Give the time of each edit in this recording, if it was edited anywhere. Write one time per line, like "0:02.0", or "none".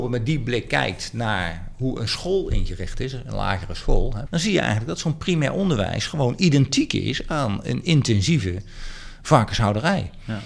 0:04.3